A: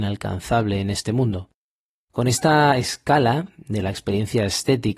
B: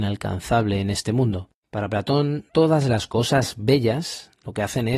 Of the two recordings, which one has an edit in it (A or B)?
B